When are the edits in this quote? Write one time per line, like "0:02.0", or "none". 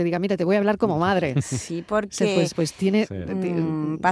none

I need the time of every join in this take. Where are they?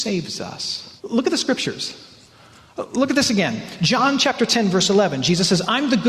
0:01.0

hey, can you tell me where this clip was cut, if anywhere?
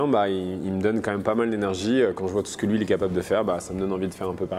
none

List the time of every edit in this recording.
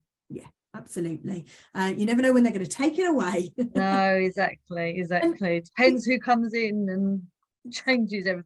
none

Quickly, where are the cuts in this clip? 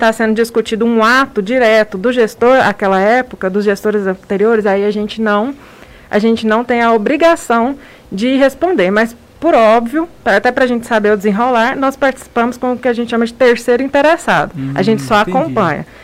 none

